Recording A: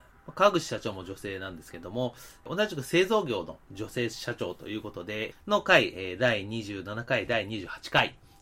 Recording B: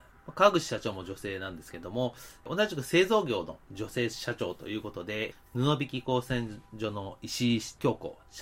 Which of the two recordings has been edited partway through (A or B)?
A